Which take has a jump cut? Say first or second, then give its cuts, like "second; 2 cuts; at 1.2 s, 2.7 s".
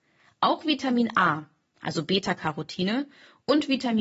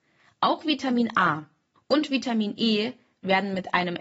second; 1 cut; at 1.8 s